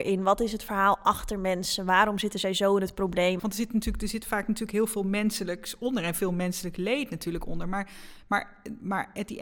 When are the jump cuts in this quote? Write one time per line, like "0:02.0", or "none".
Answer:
0:03.4